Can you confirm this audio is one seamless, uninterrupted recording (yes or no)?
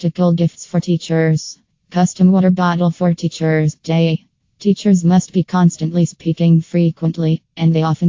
yes